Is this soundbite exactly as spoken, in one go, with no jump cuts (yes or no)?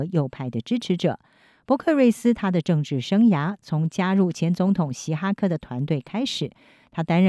yes